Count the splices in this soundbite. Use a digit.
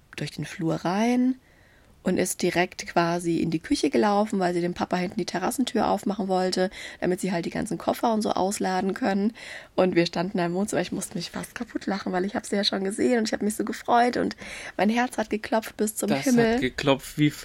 0